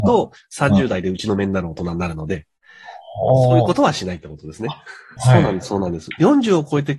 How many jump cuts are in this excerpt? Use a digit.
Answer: 1